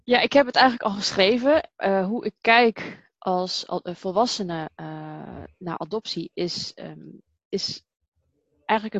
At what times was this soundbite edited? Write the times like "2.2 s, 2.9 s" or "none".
none